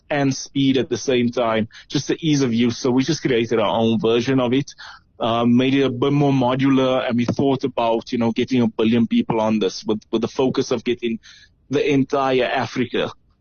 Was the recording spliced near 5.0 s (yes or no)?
no